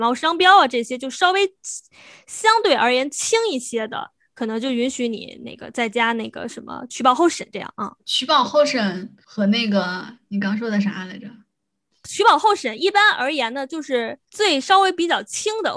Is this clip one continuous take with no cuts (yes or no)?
no